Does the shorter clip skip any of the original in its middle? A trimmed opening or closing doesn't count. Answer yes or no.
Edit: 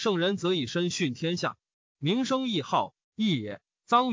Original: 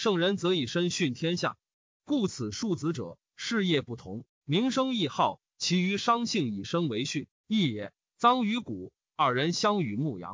yes